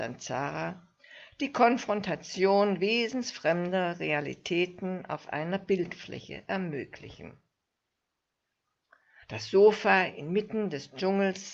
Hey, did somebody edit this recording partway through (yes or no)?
yes